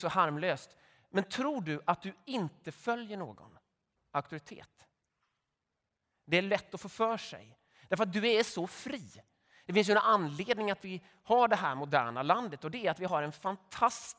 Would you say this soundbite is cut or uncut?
uncut